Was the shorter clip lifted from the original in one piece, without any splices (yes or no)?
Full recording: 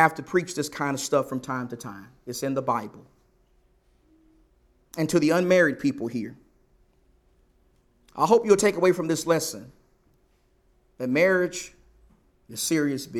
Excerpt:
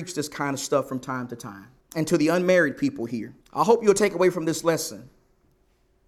no